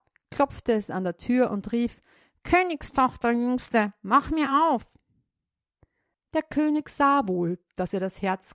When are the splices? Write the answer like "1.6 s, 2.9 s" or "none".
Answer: 6.1 s